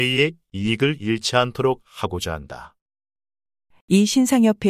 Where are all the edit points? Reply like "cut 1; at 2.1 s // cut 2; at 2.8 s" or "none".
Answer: cut 1; at 3.7 s